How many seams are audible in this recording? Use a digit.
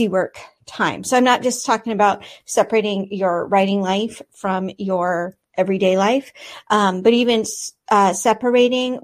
0